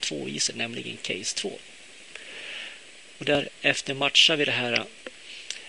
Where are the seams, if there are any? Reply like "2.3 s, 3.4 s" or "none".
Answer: 3.2 s